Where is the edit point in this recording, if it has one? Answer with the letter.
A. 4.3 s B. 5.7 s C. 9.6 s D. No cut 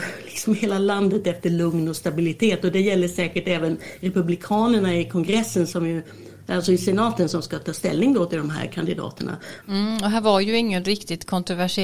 C